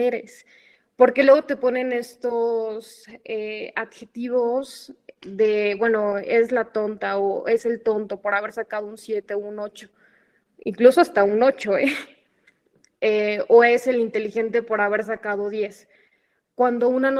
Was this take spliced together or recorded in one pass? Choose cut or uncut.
uncut